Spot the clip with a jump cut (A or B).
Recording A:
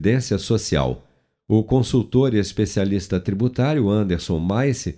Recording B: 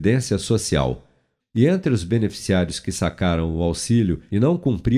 B